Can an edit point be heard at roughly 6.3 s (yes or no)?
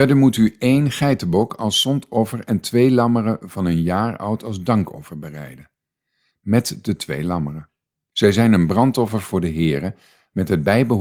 yes